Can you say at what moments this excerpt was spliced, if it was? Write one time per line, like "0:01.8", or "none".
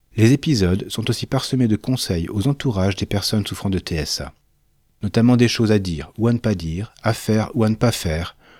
none